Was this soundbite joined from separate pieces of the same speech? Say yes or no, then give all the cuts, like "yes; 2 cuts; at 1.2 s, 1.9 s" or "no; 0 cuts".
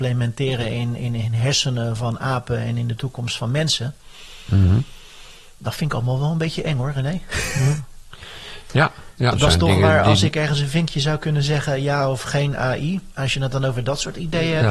yes; 1 cut; at 9.3 s